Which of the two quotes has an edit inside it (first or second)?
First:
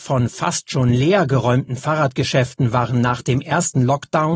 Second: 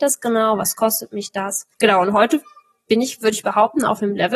second